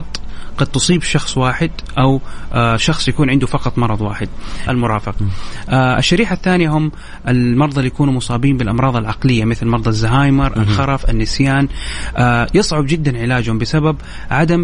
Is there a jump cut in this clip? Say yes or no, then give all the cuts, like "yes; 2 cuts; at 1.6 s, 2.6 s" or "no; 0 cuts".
yes; 1 cut; at 4.7 s